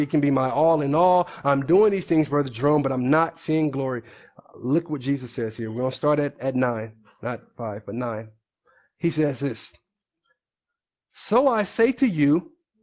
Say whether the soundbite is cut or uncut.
uncut